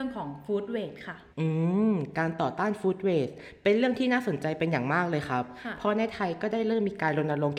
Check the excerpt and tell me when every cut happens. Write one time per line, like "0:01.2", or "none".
0:01.3